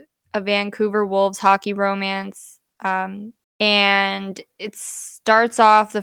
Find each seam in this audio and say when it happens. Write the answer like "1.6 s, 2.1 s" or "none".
3.4 s